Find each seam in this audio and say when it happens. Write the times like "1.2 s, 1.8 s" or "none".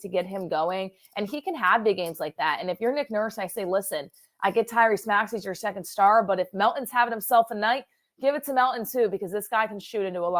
none